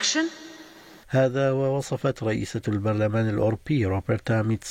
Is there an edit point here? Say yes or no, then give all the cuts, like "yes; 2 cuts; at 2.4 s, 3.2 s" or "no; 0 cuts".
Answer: yes; 1 cut; at 1.0 s